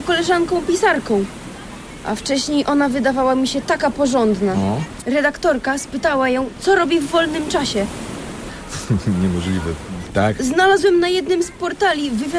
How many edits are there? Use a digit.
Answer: 3